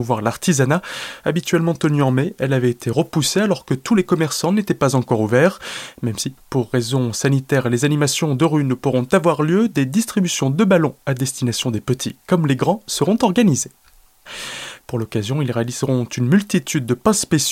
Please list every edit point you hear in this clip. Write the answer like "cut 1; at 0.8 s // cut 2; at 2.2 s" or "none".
cut 1; at 1.2 s // cut 2; at 14.8 s